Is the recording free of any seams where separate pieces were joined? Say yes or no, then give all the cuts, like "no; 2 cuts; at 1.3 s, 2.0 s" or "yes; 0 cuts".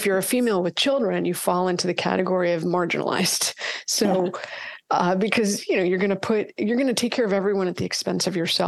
yes; 0 cuts